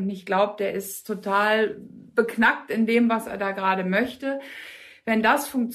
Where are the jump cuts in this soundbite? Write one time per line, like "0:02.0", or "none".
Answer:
none